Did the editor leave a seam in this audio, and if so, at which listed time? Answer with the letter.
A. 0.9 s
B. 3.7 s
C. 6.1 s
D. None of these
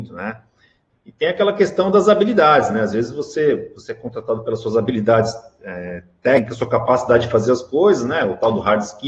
A